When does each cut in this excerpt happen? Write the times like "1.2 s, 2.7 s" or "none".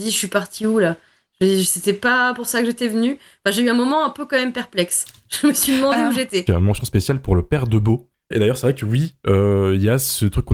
6.5 s, 8.3 s